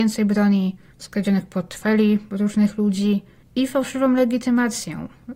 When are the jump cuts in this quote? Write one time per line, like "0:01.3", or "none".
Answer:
0:00.9